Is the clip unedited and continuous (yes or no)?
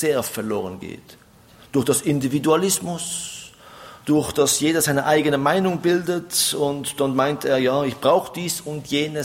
yes